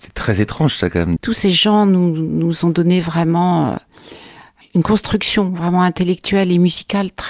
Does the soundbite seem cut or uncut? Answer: cut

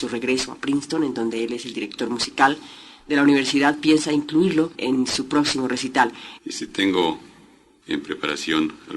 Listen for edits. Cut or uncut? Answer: cut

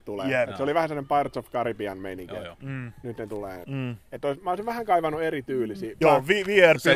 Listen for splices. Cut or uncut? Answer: cut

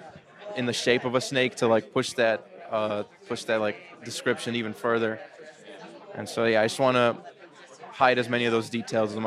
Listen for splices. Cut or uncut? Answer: uncut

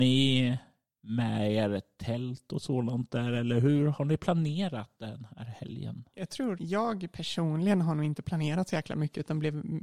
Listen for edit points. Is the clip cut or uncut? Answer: cut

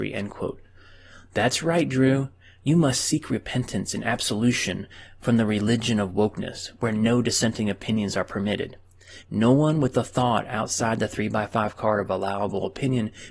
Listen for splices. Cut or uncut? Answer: cut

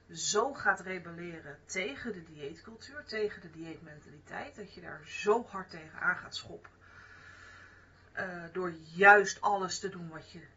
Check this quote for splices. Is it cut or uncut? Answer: uncut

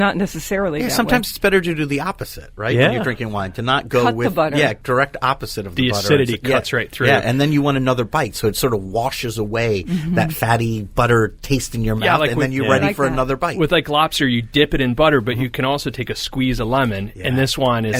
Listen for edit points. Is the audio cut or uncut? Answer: uncut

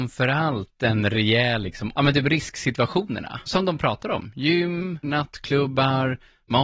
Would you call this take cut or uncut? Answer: cut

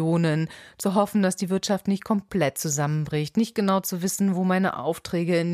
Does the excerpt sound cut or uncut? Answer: uncut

